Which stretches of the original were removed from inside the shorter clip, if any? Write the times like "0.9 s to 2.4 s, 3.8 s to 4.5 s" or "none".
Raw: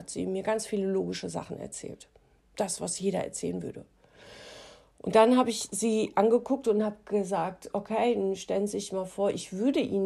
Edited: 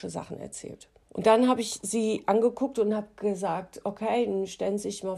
2.2 s to 4.9 s